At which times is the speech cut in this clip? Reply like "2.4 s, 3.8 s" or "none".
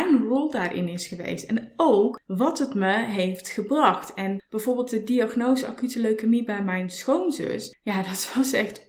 none